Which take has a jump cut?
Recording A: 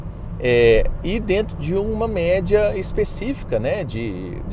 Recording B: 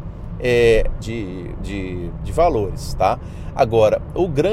B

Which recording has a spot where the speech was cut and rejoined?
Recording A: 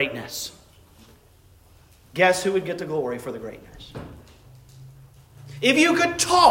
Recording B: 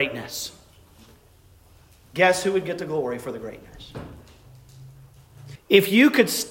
B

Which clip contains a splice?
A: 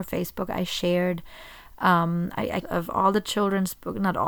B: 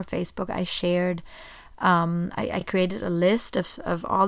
A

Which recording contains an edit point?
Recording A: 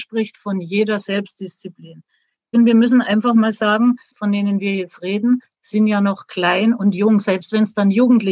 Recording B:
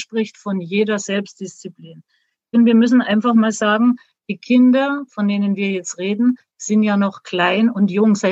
A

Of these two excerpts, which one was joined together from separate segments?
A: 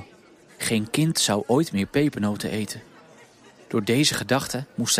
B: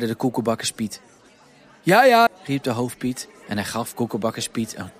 B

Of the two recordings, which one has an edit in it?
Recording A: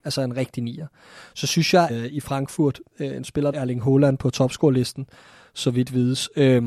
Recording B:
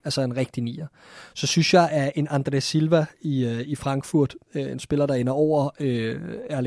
A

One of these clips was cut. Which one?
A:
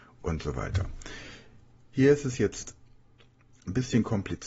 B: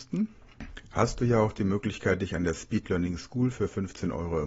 A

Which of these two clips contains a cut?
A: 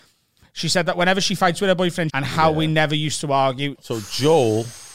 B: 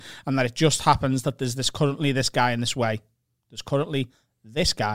A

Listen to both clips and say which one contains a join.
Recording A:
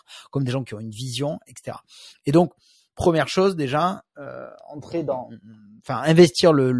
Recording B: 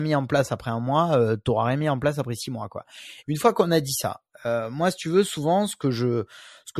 B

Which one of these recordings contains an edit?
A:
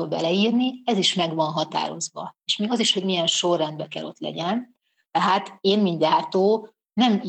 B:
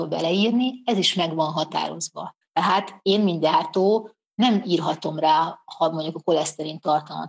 B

